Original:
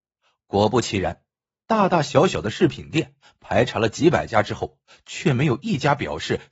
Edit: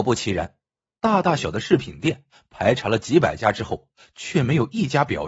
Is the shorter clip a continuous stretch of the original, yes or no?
no